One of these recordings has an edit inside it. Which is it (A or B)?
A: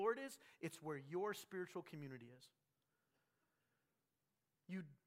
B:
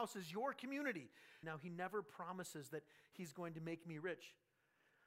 B